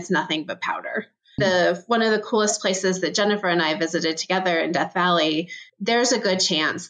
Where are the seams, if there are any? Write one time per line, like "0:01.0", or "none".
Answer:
0:01.4
0:05.7